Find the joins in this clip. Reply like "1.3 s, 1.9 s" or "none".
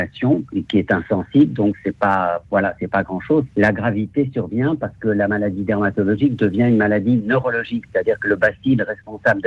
3.5 s